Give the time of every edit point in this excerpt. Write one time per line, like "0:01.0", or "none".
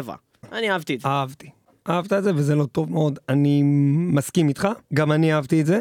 0:04.8